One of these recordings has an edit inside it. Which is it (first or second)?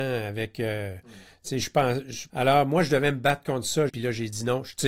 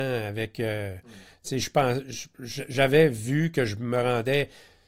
first